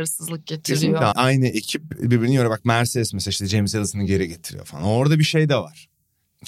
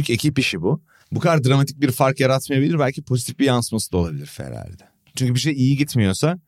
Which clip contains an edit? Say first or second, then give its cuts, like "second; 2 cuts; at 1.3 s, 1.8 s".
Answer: first; 1 cut; at 1.1 s